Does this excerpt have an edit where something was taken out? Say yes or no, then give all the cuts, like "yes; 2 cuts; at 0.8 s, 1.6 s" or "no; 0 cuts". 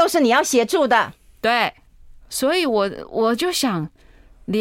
yes; 1 cut; at 2.2 s